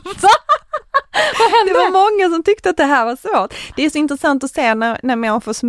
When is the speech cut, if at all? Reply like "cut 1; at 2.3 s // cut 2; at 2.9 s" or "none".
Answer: none